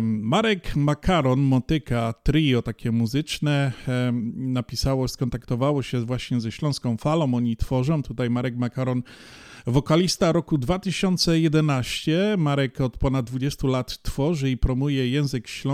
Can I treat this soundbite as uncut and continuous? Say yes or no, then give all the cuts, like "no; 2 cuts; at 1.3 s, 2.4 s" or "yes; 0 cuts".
yes; 0 cuts